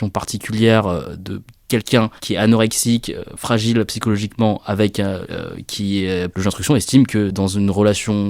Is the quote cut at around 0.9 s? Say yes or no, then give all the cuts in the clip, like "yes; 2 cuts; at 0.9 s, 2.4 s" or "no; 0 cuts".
no; 3 cuts; at 2.2 s, 5.3 s, 6.3 s